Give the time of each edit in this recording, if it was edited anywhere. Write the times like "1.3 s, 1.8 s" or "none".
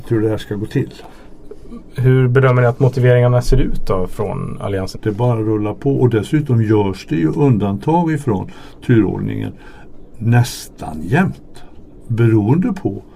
4.9 s

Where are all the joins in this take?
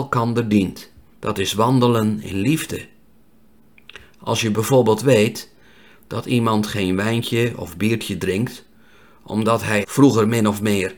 1.2 s, 9.8 s

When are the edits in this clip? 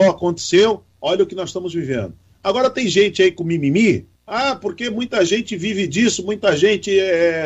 4.2 s

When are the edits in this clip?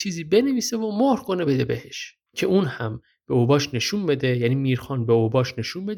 2.3 s

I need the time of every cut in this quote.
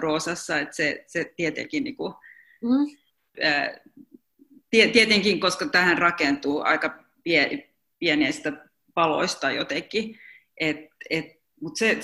3.3 s

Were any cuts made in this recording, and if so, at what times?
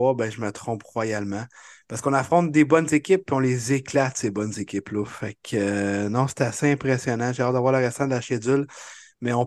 none

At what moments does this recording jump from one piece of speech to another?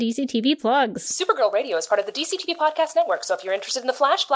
none

